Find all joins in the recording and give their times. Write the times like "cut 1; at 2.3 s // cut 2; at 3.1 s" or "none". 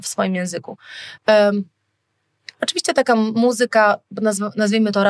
cut 1; at 1.2 s